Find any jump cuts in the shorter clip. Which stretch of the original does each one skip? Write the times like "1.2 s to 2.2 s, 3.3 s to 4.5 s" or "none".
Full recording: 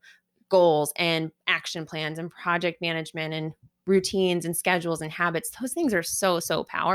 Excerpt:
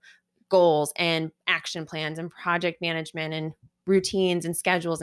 none